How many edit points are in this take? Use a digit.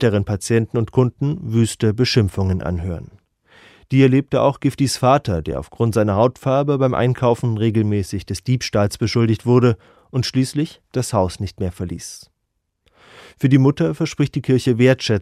1